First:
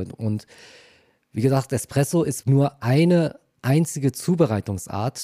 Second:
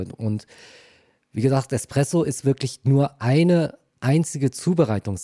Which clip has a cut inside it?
first; 1 cut; at 2.4 s

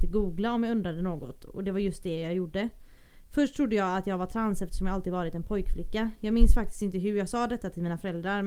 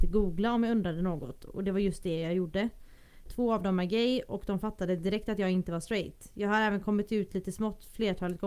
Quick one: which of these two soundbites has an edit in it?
second; 1 cut; at 3.3 s

